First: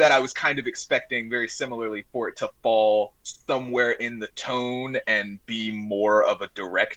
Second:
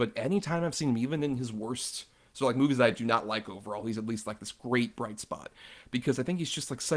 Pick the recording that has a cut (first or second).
first